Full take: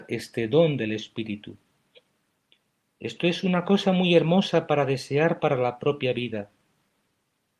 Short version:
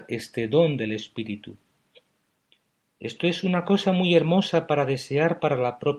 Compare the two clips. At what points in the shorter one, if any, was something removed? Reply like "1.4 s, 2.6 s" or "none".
none